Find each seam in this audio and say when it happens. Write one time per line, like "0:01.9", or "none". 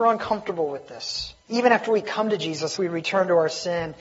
0:01.5
0:02.8